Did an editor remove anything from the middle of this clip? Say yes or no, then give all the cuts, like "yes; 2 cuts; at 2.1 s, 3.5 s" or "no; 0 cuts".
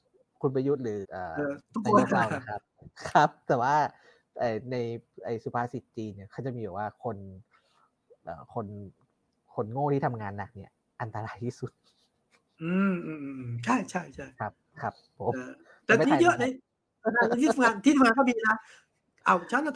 yes; 2 cuts; at 1.0 s, 16.0 s